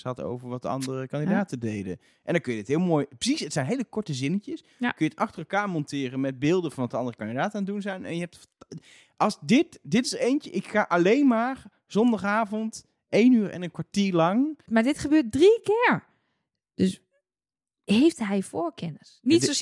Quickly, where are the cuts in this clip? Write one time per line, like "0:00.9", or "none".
0:14.7